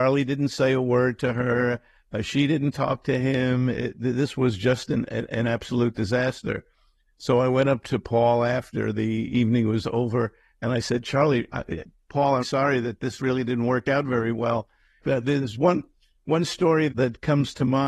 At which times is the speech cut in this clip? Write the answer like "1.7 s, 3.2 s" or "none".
12.4 s, 15.0 s, 16.9 s